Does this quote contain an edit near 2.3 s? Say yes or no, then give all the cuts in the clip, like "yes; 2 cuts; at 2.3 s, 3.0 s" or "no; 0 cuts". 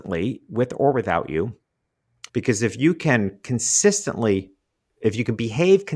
yes; 1 cut; at 2.3 s